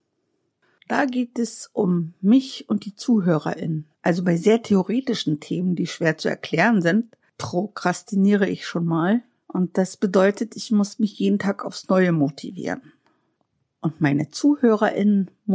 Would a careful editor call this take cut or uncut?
uncut